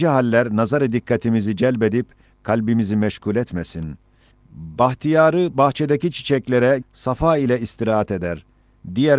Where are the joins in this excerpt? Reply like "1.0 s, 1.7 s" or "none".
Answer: 4.3 s, 6.8 s